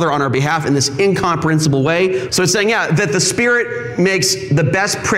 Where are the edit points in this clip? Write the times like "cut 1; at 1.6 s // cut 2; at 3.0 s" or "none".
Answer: cut 1; at 2.3 s